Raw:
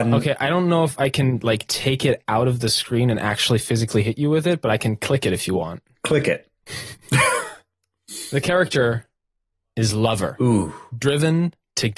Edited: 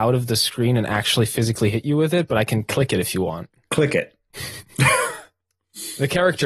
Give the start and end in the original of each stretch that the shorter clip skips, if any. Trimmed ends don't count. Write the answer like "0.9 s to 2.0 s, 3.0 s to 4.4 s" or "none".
none